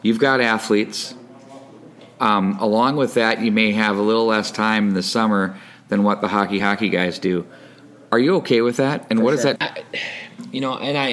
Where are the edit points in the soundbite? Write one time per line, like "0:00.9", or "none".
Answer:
0:06.6
0:09.6